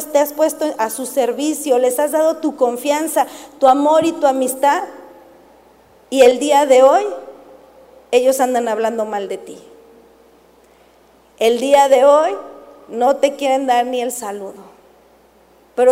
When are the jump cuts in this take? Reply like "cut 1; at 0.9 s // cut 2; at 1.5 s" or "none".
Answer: none